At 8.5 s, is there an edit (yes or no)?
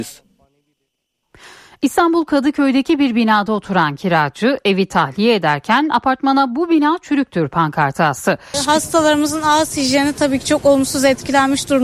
yes